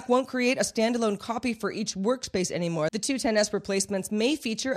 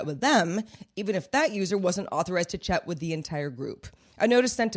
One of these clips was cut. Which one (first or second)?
first